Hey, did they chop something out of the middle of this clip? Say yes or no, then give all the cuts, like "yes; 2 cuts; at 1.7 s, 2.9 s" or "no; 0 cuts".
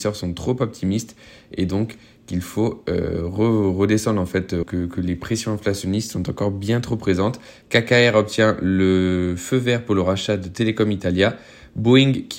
yes; 2 cuts; at 4.6 s, 7.6 s